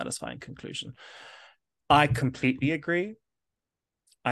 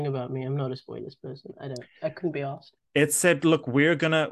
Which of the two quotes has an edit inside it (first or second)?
second